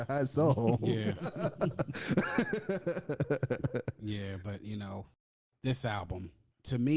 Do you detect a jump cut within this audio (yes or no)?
no